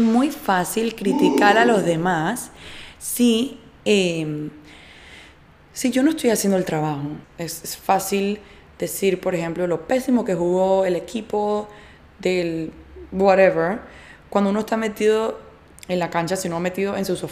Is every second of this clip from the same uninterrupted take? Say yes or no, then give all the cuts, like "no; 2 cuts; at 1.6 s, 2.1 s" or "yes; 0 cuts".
no; 2 cuts; at 7.2 s, 15.7 s